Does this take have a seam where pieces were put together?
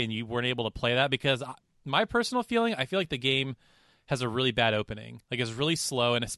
no; 0 cuts

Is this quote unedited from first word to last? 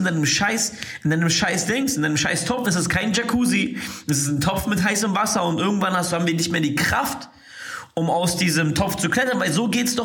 no; 1 cut; at 2.6 s

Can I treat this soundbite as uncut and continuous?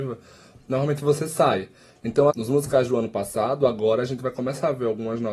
no; 1 cut; at 2.3 s

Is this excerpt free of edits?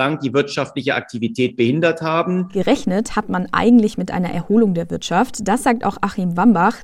yes; 0 cuts

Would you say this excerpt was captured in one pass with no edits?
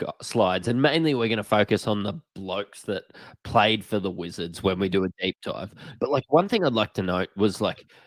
yes; 0 cuts

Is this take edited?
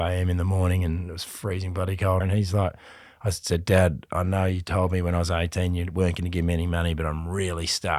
yes; 1 cut; at 2.2 s

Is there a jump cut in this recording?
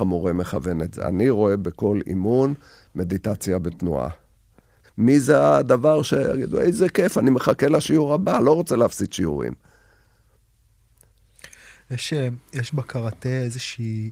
yes; 1 cut; at 4.8 s

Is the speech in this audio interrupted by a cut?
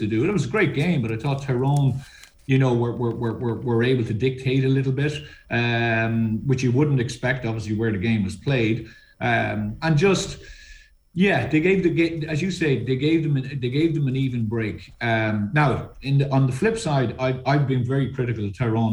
no; 0 cuts

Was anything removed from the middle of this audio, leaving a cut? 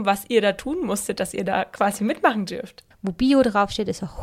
yes; 1 cut; at 2.9 s

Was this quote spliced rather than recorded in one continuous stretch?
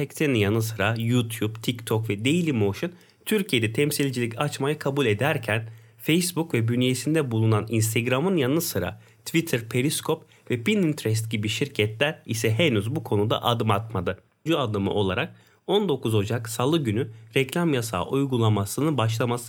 yes; 1 cut; at 14.5 s

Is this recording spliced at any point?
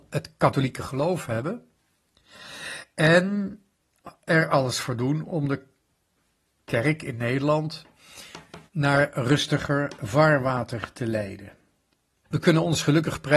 yes; 2 cuts; at 8.7 s, 12.2 s

